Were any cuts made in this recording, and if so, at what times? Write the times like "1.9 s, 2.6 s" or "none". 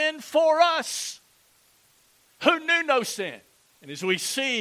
3.7 s